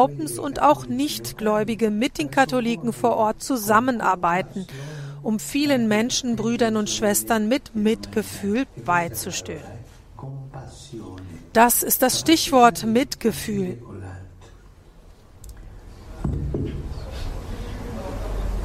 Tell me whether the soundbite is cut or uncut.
uncut